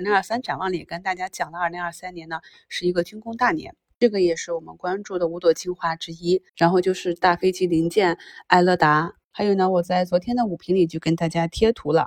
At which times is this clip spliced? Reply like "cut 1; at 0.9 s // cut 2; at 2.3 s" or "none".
cut 1; at 6.5 s